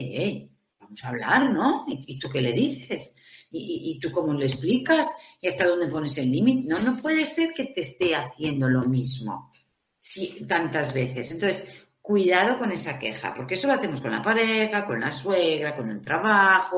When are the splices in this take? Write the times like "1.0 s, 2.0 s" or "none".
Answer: none